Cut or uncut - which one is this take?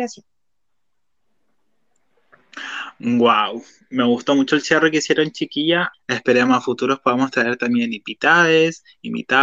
cut